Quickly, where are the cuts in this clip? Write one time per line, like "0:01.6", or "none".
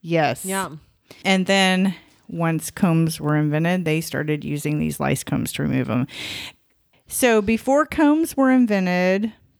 0:01.2
0:06.9